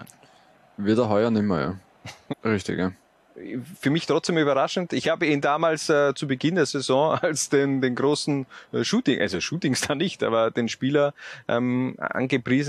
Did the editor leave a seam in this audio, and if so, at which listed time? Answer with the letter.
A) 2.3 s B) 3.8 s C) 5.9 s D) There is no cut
A